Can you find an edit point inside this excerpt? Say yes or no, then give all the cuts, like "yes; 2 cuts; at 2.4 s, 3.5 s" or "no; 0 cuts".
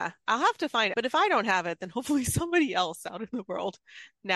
yes; 1 cut; at 0.9 s